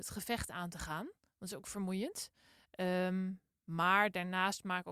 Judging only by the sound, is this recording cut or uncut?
uncut